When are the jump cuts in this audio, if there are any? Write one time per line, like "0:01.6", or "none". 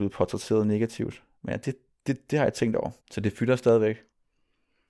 0:01.4
0:03.0